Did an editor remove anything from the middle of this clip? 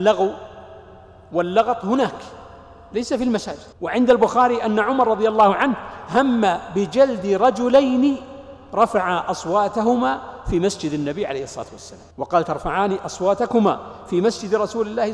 yes; 2 cuts; at 3.7 s, 12.1 s

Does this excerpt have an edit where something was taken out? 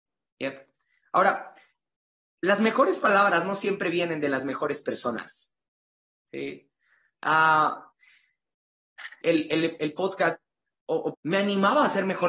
yes; 2 cuts; at 9.2 s, 11.1 s

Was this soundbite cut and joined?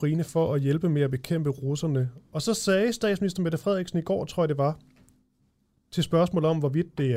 no; 0 cuts

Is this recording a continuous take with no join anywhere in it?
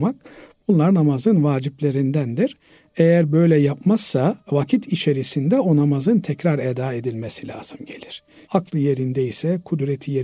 no; 2 cuts; at 4.4 s, 8.4 s

